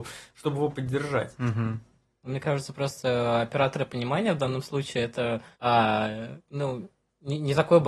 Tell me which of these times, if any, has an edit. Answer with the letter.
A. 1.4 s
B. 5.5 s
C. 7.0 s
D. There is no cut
B